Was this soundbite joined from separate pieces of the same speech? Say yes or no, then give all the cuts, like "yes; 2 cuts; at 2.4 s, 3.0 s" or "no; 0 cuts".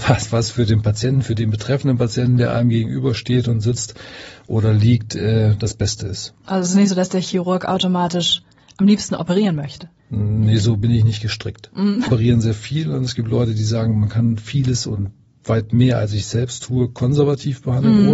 yes; 2 cuts; at 10.0 s, 12.1 s